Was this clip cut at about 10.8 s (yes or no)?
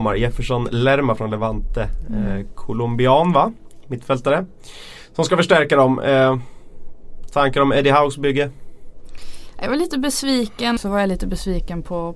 yes